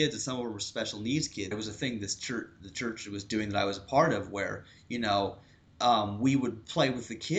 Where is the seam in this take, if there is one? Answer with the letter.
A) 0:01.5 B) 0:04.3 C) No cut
A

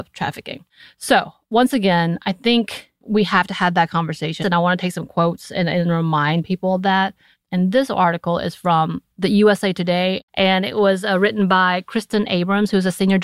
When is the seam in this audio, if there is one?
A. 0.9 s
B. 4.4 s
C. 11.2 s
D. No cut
B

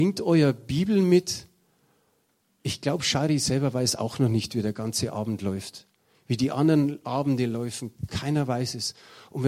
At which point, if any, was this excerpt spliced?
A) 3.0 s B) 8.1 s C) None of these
B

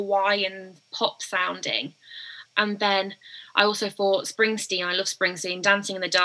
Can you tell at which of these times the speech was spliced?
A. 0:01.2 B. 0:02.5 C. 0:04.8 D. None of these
B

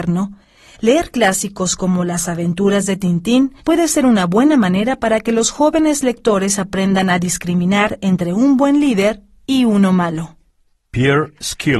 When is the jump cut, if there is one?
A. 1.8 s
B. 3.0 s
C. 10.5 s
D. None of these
D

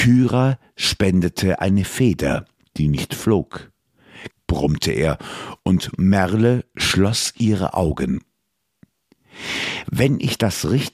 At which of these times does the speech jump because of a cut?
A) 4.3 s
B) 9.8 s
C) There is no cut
A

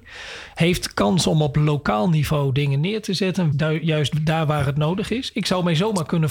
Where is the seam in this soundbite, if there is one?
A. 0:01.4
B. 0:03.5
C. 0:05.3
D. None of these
B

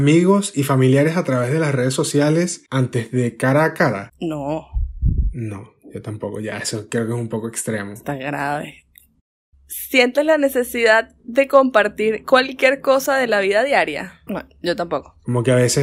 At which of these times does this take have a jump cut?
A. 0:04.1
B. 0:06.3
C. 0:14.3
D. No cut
C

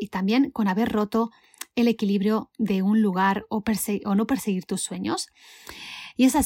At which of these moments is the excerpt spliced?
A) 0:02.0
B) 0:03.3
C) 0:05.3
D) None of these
D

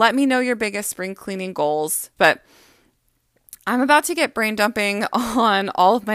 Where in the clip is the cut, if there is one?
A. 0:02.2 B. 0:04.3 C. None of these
A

